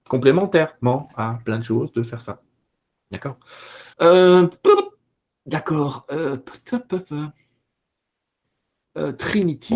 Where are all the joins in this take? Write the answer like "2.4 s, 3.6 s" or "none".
3.9 s